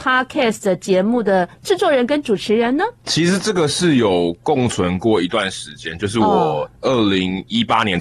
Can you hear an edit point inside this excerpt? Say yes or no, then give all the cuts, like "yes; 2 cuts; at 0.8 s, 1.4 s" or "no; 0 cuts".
yes; 1 cut; at 3.0 s